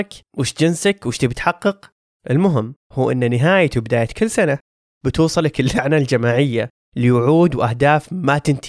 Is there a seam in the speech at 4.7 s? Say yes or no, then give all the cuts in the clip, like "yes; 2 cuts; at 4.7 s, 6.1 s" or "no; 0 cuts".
no; 1 cut; at 2.8 s